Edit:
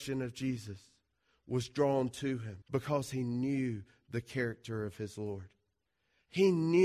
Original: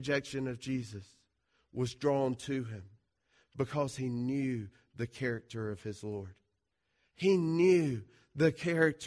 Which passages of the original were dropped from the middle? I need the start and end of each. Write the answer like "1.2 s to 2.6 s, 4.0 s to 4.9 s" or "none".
2.9 s to 3.5 s